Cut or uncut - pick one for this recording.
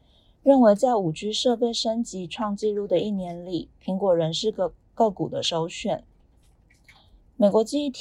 uncut